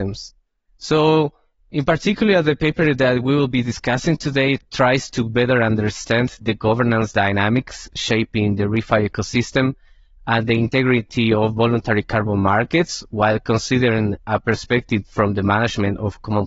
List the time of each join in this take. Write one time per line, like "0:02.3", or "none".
none

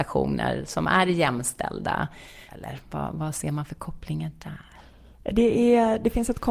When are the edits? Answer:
0:02.5

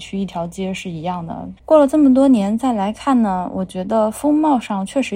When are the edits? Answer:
0:01.6

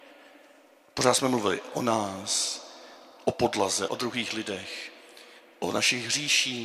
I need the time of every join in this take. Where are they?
0:03.9

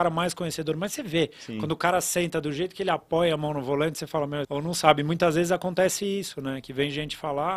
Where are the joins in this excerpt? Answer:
0:04.4

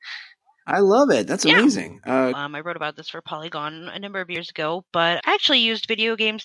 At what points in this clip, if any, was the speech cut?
0:02.3
0:05.2

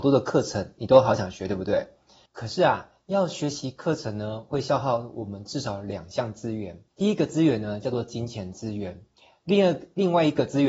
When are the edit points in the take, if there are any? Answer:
0:06.9

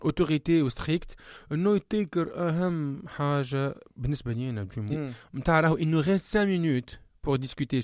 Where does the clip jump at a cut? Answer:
0:04.9

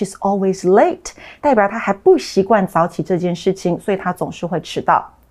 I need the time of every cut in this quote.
none

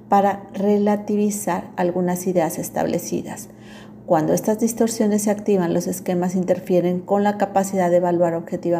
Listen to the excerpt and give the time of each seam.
none

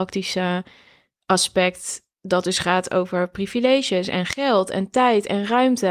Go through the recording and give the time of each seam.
none

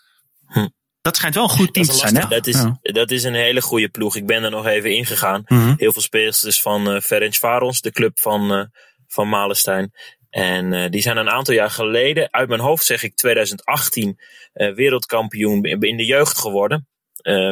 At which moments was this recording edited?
0:02.2

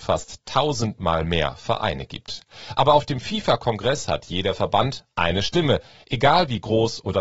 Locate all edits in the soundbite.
none

